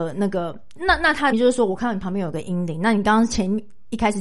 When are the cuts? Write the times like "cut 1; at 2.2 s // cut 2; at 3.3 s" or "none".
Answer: cut 1; at 1.3 s